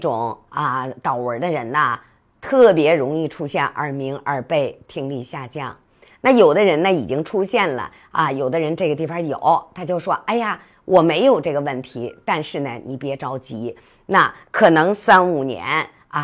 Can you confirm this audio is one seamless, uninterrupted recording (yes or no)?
yes